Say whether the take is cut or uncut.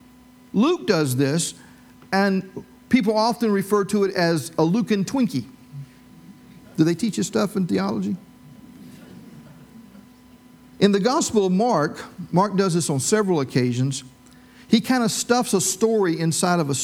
cut